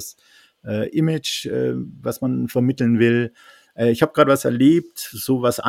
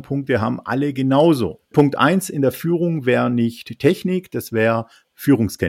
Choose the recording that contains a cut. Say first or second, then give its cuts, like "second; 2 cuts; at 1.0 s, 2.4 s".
second; 1 cut; at 1.7 s